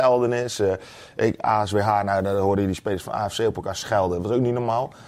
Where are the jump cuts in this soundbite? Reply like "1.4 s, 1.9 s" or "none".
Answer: 1.4 s